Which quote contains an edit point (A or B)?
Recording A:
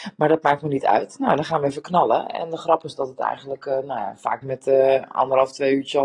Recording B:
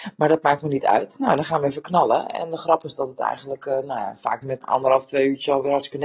B